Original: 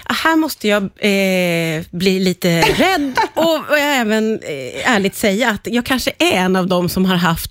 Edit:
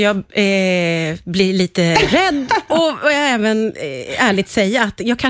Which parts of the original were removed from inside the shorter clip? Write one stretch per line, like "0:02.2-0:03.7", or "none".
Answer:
none